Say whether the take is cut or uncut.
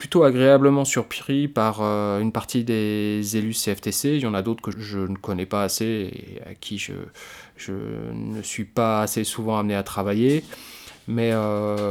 cut